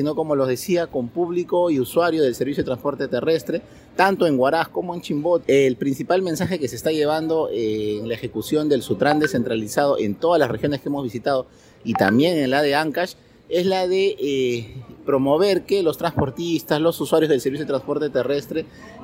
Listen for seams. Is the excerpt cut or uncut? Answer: cut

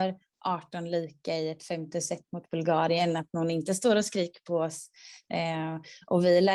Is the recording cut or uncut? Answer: cut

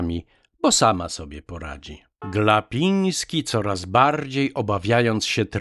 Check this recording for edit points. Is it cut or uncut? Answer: cut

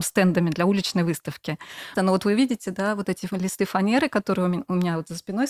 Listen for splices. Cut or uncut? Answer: cut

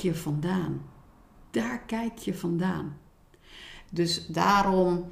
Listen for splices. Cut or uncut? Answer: cut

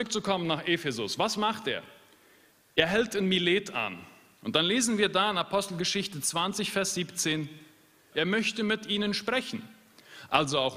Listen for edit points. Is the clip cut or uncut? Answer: cut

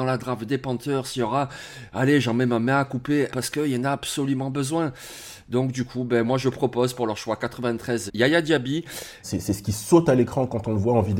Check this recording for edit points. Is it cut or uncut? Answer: cut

